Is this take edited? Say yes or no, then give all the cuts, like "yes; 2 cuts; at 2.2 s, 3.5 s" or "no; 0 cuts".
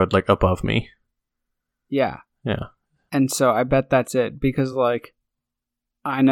no; 0 cuts